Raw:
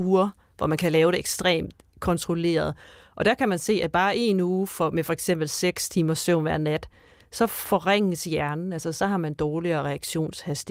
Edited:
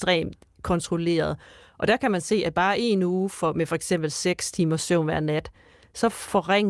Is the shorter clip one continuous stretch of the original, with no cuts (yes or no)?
yes